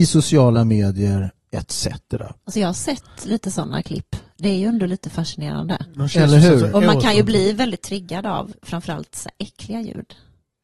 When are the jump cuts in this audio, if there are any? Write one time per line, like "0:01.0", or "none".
none